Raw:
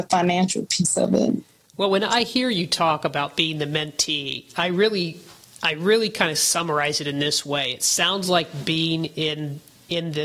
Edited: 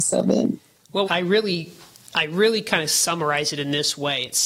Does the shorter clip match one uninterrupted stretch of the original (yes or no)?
no